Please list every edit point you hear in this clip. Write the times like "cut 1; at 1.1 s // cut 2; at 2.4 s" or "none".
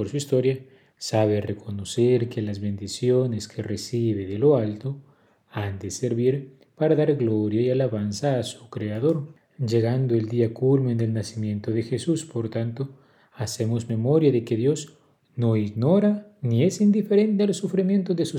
none